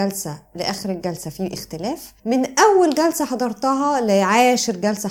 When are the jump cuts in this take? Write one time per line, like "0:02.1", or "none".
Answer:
0:02.2